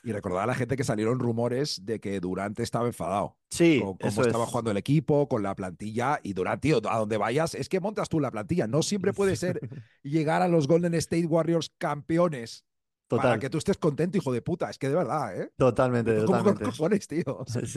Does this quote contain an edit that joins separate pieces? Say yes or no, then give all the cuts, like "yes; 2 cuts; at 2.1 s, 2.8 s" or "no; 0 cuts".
yes; 1 cut; at 3.4 s